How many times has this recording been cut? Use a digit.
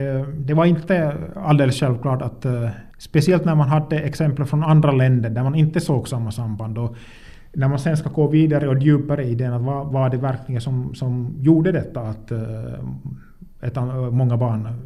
1